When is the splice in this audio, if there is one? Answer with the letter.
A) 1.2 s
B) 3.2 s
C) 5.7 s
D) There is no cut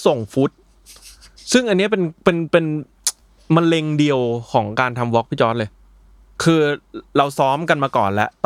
D